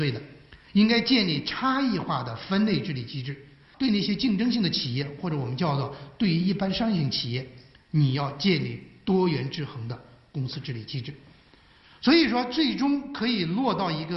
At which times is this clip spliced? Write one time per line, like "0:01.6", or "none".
0:03.7